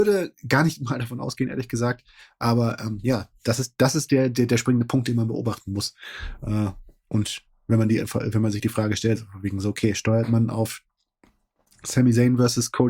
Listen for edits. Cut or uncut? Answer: uncut